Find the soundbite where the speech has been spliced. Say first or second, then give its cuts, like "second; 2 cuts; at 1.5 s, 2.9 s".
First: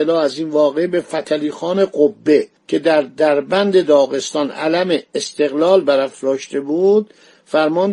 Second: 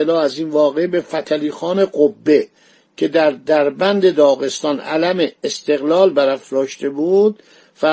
first; 1 cut; at 2.6 s